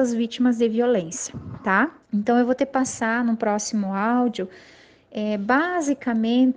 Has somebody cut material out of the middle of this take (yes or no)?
yes